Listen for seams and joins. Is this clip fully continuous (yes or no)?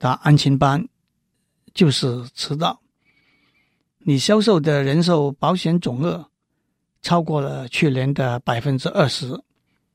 yes